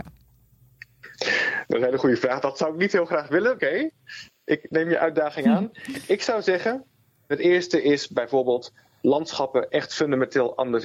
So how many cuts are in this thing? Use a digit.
1